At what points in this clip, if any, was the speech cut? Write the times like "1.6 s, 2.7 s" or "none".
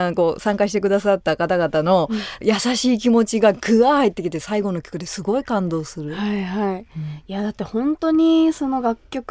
none